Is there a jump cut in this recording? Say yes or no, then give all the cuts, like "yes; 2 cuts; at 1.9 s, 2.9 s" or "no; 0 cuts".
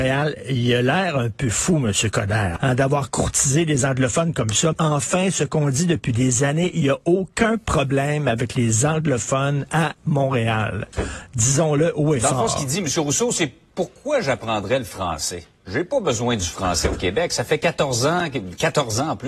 yes; 2 cuts; at 2.6 s, 4.7 s